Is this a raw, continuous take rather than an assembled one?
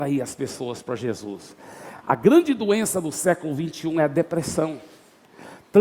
yes; 0 cuts

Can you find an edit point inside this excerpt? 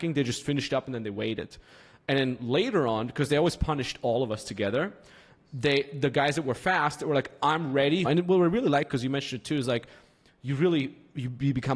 yes; 1 cut; at 8.0 s

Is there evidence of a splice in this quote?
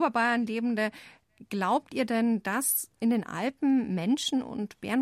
no; 0 cuts

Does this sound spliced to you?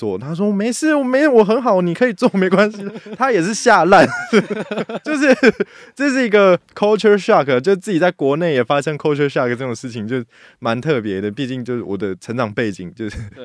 no; 0 cuts

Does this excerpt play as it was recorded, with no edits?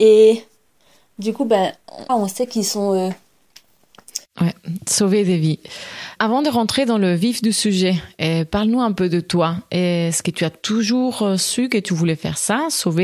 no; 2 cuts; at 2.1 s, 4.2 s

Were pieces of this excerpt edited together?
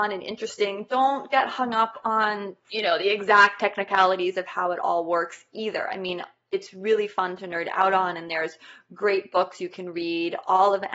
no; 0 cuts

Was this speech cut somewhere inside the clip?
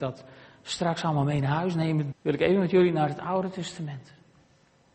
yes; 1 cut; at 2.1 s

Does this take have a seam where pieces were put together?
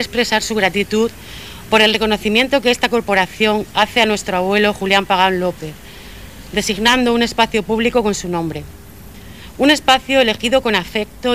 no; 0 cuts

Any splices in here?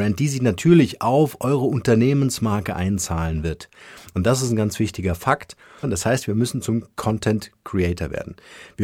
yes; 1 cut; at 5.8 s

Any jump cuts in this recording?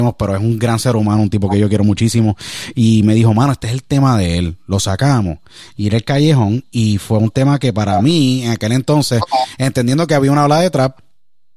no; 0 cuts

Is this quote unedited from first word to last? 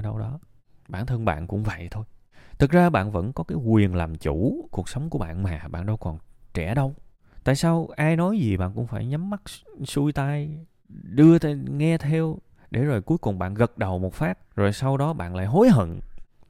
no; 1 cut; at 14.5 s

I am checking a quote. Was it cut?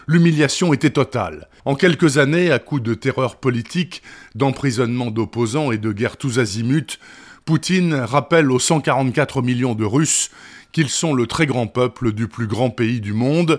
yes; 1 cut; at 1.6 s

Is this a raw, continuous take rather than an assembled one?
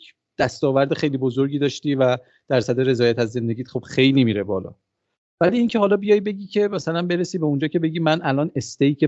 yes; 0 cuts

